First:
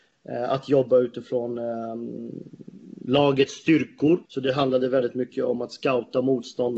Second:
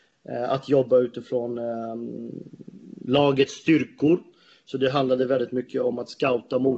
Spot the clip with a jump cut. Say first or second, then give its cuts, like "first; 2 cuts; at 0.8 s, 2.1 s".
first; 1 cut; at 4.2 s